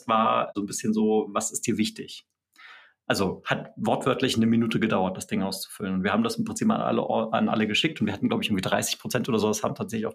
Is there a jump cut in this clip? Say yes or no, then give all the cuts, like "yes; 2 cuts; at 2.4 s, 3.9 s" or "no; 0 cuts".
no; 0 cuts